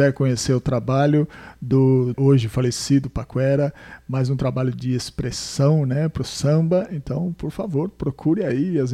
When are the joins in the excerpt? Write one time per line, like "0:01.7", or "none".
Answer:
0:02.1